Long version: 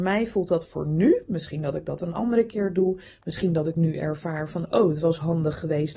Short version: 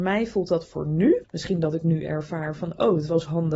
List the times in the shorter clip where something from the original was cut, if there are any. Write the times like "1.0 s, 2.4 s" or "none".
1.2 s